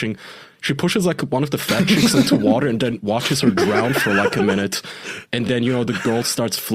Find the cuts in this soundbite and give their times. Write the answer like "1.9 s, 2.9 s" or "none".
none